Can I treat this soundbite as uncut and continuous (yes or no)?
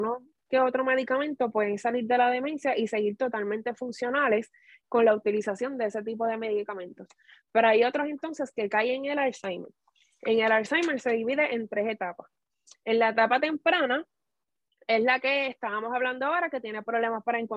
yes